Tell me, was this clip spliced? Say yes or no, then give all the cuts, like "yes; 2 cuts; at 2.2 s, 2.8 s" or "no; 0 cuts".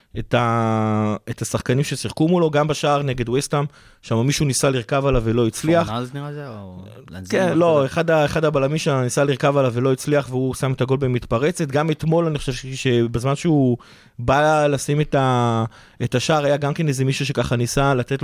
no; 0 cuts